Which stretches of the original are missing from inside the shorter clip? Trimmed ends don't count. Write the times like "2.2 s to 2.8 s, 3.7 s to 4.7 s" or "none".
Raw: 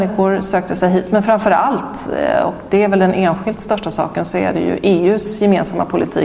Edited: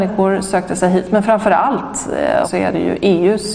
2.4 s to 4.2 s